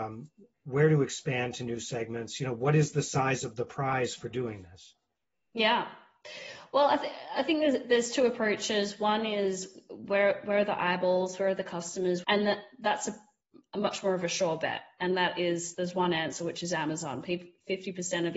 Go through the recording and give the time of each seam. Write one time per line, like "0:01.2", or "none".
0:12.2
0:15.7